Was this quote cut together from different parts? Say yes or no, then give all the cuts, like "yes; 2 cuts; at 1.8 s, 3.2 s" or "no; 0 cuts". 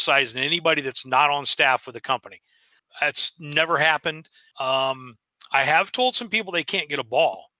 yes; 2 cuts; at 2.8 s, 4.5 s